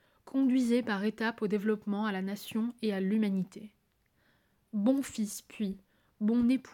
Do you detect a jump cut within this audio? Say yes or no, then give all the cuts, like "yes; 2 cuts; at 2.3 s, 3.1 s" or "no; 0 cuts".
no; 0 cuts